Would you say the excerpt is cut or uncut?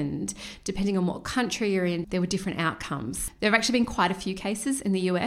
cut